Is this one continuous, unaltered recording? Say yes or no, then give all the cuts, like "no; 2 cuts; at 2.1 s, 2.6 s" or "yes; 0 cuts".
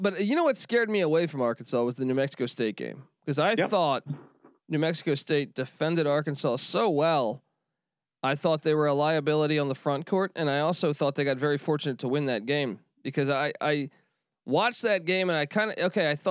yes; 0 cuts